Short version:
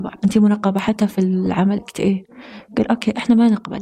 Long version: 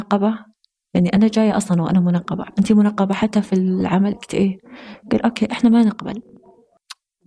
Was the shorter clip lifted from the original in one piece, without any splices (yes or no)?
yes